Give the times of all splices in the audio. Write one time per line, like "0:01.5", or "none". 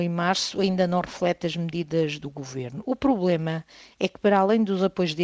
none

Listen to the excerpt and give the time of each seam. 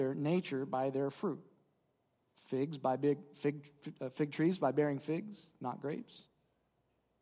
none

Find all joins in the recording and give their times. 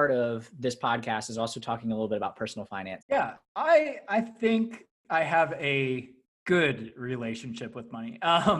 0:03.0

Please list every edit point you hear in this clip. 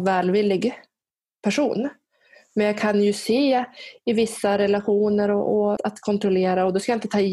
0:05.8

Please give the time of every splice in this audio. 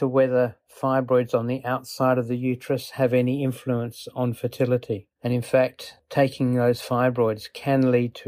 0:05.2

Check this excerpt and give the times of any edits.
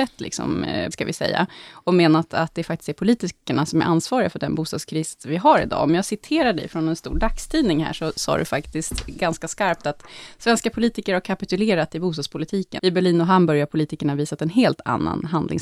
0:00.9
0:12.8

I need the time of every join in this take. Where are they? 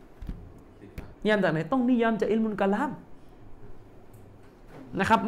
0:01.1

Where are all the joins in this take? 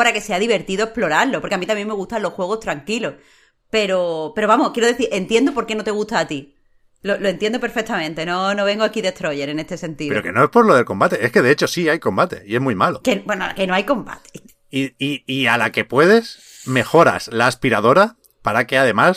none

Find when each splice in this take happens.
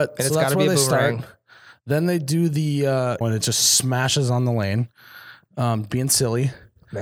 0:03.2

